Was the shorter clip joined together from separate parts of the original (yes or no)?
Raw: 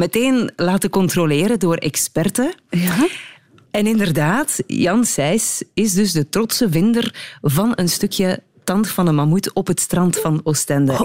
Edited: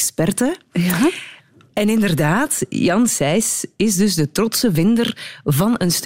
no